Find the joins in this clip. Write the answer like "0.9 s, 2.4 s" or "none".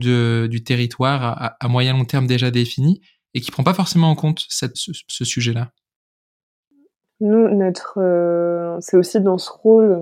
4.7 s